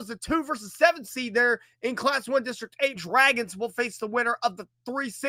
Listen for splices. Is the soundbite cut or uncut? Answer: cut